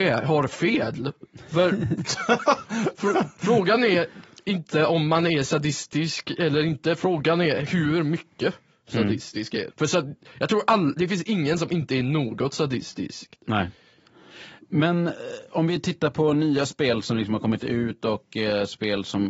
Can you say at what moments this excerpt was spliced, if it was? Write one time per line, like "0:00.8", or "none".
0:09.7